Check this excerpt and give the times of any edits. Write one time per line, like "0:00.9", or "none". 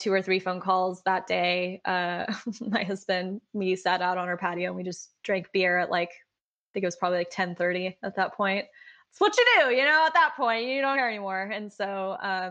0:10.9

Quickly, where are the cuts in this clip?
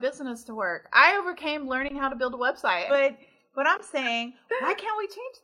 0:02.9

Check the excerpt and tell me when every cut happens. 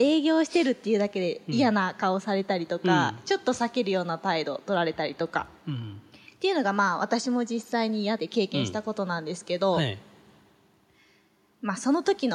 0:08.2

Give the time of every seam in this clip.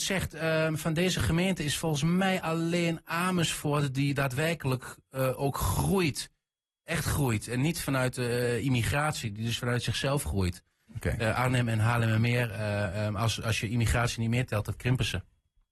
0:10.9

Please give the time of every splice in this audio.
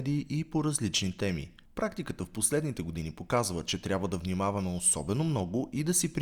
0:01.7

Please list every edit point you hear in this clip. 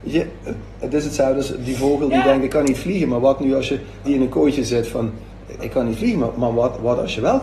0:04.1
0:05.6

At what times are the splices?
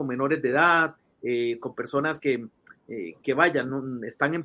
none

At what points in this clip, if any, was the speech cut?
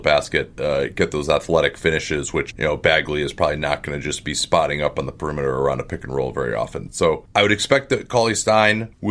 none

